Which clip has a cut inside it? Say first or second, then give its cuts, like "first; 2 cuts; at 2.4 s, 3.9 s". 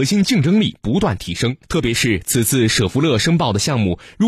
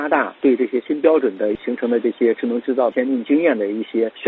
first; 1 cut; at 1.6 s